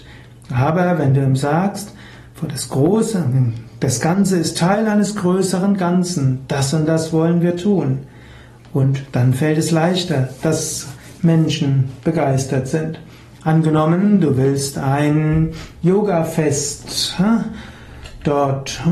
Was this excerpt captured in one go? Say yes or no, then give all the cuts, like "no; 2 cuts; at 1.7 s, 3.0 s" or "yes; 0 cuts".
yes; 0 cuts